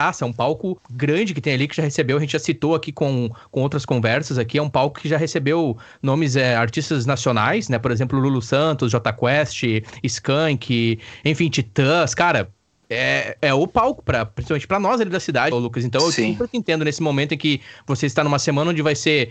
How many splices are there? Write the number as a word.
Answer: two